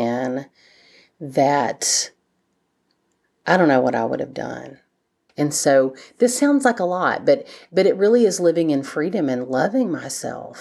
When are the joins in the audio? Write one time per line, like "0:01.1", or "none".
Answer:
0:05.3